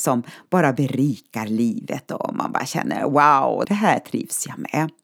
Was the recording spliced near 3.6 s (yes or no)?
yes